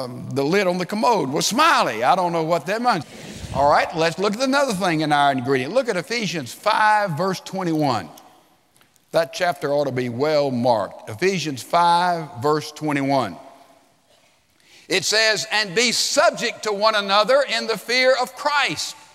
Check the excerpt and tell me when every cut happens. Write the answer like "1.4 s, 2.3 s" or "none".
3.0 s